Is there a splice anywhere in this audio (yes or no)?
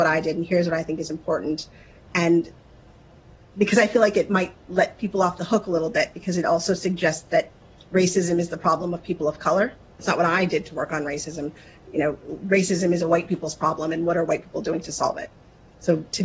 yes